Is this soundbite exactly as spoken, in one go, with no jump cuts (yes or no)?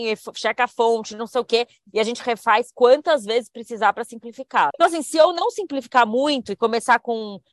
no